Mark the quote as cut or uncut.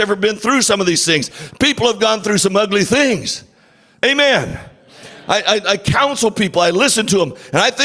uncut